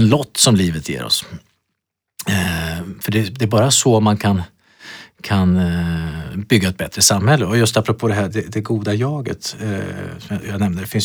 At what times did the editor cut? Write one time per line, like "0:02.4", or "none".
0:08.3